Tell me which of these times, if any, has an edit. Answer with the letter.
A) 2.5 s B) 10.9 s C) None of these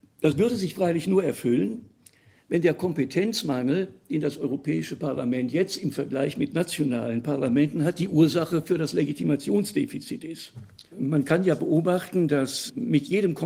B